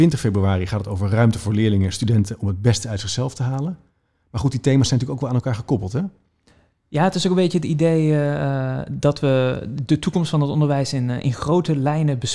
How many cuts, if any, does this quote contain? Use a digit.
0